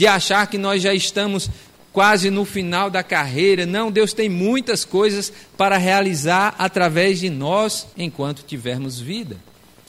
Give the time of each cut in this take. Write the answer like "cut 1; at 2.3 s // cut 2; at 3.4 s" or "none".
cut 1; at 7.9 s